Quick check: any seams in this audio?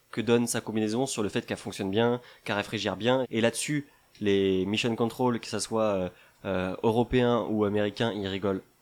yes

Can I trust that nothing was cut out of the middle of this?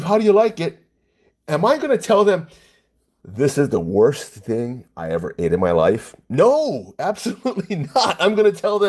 yes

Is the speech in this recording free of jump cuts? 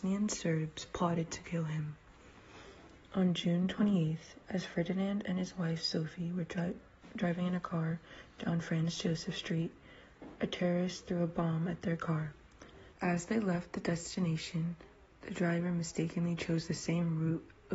no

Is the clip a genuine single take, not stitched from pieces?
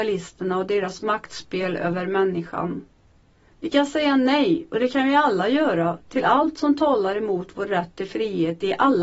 no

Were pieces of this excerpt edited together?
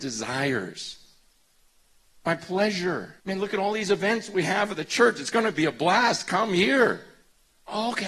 yes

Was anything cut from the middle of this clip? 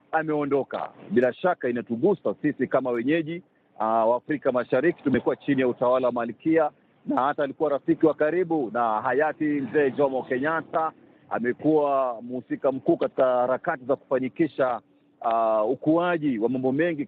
no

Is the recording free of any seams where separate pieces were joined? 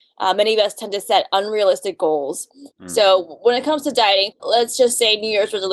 no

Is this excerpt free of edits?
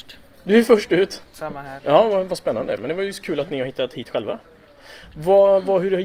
no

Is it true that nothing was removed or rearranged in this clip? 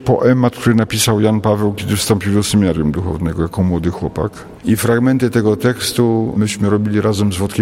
no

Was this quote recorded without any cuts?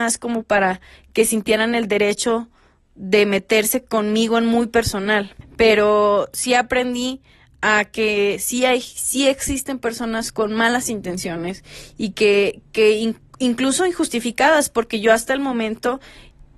no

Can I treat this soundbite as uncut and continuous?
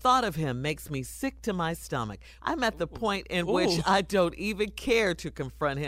no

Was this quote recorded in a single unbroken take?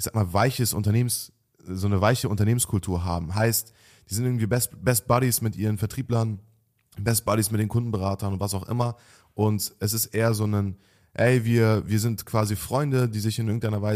yes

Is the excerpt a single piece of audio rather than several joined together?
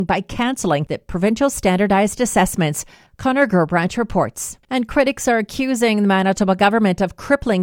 no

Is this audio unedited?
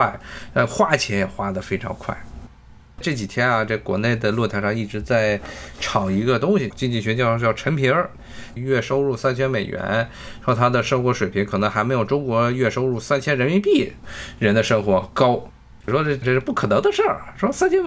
no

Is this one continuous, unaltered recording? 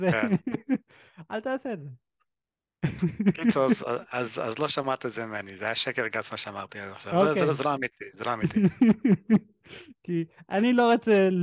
yes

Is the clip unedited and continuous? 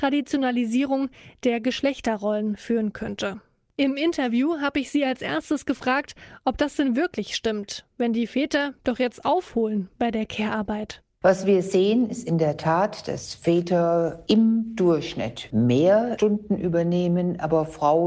yes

